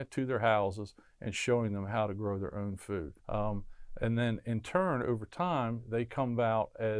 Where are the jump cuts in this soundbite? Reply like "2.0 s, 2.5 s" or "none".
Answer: 3.2 s